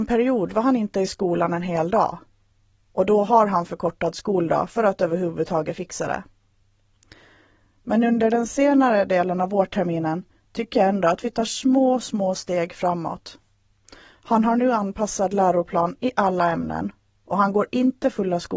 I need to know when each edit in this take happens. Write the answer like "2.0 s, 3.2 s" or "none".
none